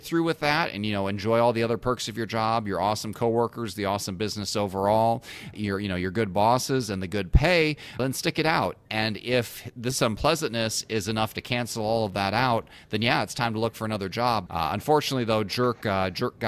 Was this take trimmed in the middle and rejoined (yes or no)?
yes